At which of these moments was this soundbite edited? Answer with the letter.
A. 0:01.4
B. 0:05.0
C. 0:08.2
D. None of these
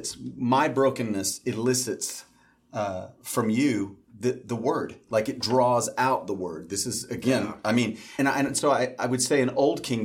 C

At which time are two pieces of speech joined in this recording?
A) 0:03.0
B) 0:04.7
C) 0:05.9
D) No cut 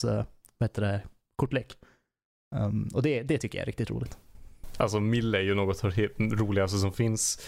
D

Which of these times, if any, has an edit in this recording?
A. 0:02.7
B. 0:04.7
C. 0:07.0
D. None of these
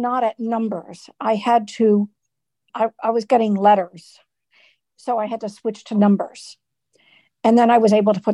A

